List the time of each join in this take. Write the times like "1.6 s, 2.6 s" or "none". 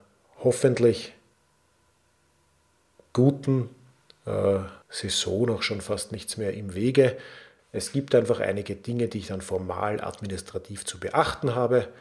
4.8 s, 7.6 s